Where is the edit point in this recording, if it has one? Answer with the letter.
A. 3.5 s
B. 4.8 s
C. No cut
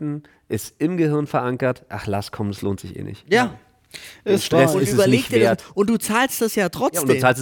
C